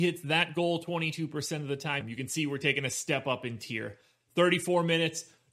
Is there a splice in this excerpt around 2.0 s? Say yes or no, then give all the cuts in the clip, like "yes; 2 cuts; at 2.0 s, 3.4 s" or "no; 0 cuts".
yes; 1 cut; at 2.0 s